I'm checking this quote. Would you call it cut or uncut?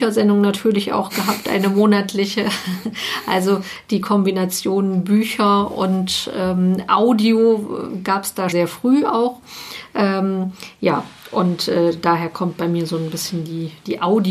cut